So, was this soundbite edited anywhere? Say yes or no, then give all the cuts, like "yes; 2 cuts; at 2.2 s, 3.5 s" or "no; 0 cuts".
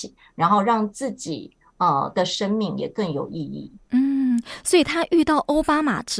no; 0 cuts